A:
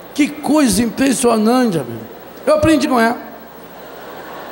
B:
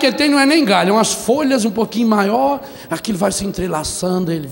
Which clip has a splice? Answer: A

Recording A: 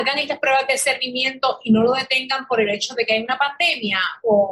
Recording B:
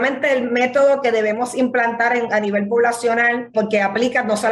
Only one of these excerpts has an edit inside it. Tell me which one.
B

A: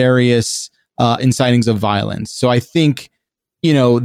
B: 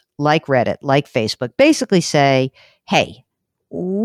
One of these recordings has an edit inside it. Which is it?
A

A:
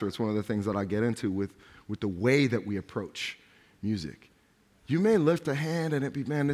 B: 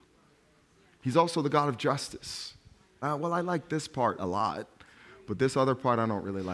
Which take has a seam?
B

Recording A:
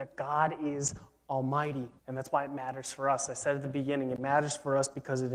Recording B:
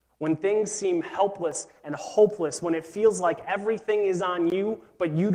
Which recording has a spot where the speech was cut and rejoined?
A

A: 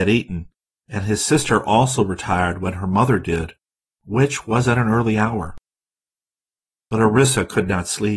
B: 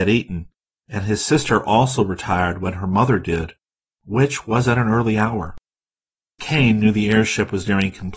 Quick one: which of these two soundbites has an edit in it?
B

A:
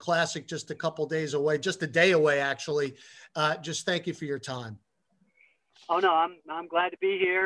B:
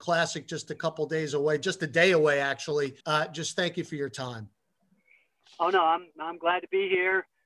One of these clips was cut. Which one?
B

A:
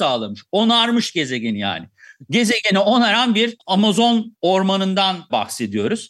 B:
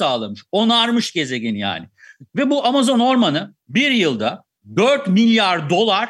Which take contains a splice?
B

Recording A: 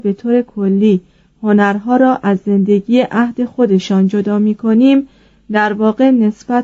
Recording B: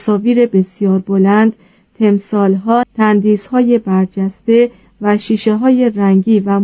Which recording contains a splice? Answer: B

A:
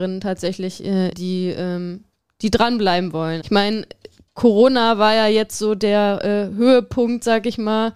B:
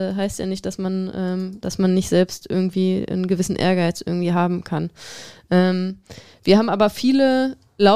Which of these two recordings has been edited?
A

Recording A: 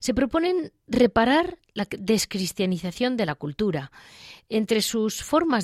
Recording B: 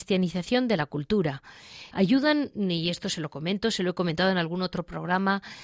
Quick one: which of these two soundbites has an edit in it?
B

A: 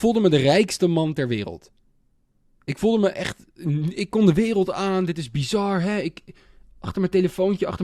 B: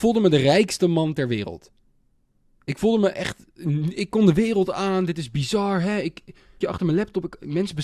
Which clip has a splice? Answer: B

